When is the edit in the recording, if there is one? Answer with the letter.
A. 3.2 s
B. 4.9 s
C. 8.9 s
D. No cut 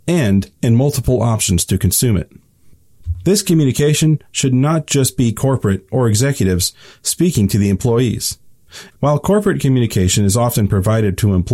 C